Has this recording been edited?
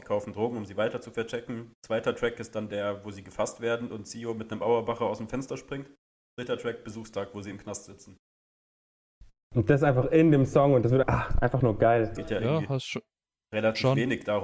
yes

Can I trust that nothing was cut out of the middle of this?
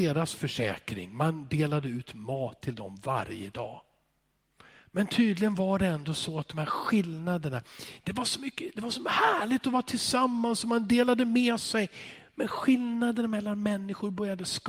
yes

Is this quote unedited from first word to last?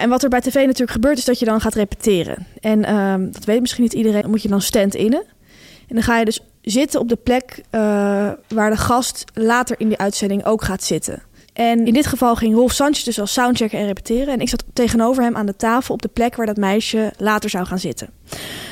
no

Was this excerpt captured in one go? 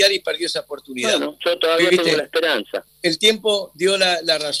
yes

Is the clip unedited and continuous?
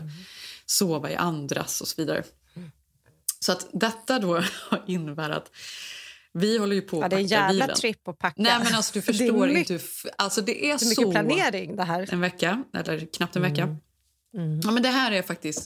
no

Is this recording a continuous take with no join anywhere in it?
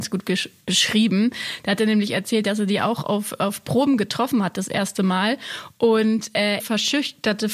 no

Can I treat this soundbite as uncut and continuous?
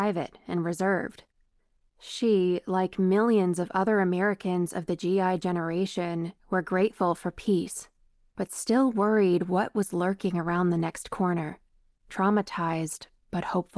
yes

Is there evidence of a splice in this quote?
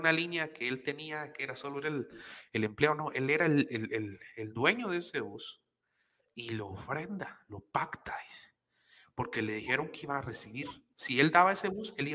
no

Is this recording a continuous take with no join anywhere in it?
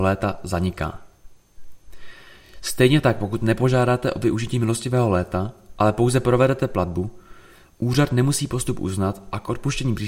yes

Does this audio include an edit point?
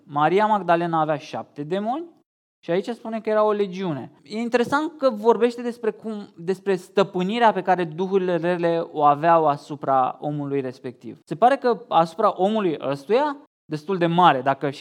yes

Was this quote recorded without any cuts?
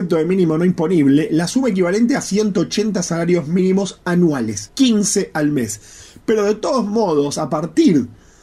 no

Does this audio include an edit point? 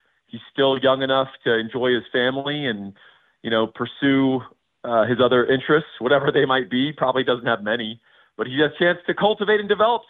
no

